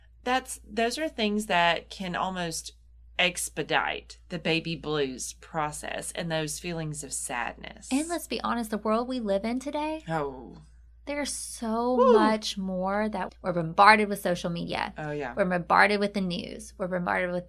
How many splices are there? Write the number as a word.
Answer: one